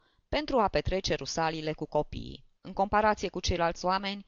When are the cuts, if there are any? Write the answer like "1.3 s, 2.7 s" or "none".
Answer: 2.6 s